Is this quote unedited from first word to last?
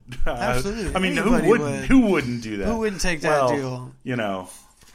yes; 0 cuts

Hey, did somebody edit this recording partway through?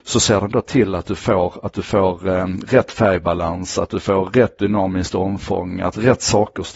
no; 0 cuts

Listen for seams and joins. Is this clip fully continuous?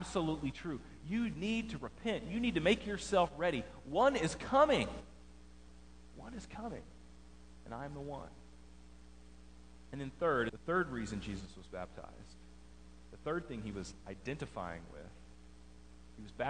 no; 1 cut; at 10.5 s

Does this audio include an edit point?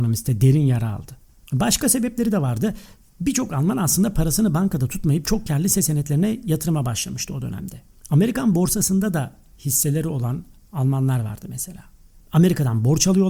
yes; 1 cut; at 12.2 s

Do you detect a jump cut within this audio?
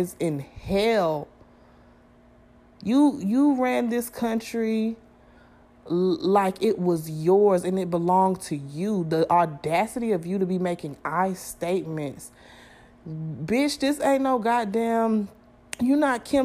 no; 0 cuts

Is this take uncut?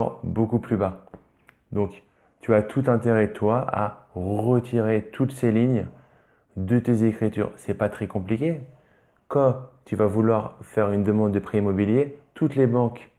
yes; 0 cuts

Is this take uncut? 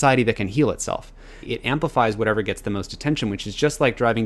yes; 0 cuts

